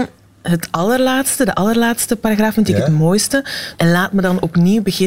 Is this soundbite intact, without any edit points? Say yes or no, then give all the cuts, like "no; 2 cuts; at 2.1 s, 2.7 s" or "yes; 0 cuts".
no; 1 cut; at 3.7 s